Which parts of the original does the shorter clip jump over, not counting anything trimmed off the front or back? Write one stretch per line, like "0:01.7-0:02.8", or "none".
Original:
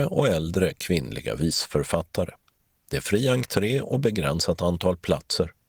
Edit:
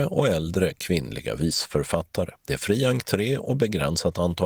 0:02.4-0:02.8